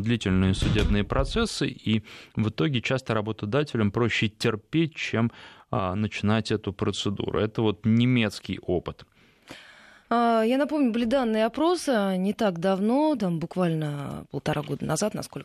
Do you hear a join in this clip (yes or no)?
no